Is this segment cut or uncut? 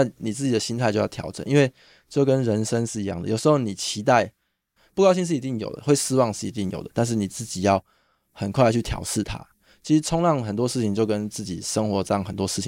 cut